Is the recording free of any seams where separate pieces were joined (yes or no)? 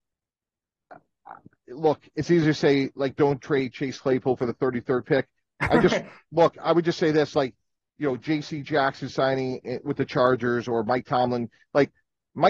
yes